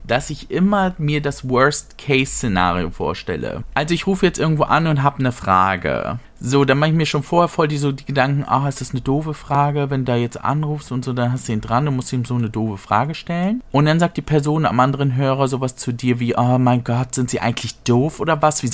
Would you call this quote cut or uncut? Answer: uncut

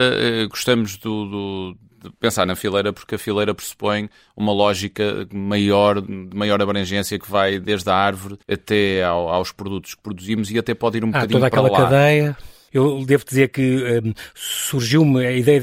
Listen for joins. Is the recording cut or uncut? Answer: cut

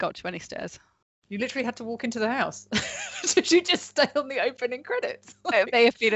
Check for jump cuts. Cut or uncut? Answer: uncut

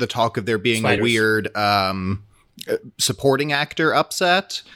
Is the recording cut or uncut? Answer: uncut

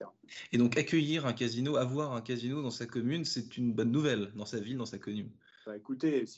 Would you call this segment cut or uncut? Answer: uncut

